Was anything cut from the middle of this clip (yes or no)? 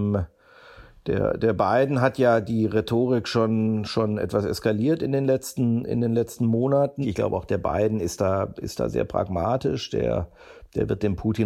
yes